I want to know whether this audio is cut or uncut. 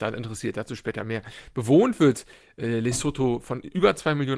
uncut